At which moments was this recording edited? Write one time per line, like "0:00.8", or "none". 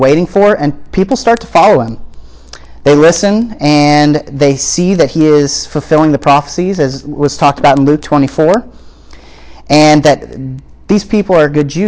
none